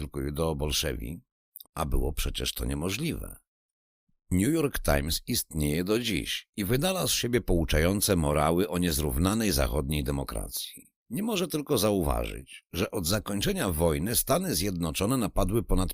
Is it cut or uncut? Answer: cut